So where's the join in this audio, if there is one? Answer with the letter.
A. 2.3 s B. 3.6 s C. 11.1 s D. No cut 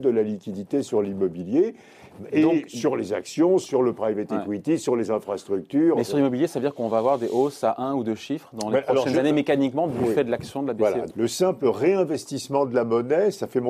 C